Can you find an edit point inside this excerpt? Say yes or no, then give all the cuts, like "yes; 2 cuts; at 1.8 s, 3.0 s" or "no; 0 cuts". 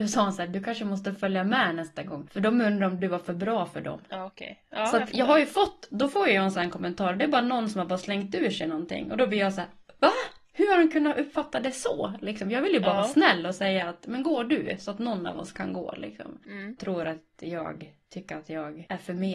yes; 1 cut; at 16.8 s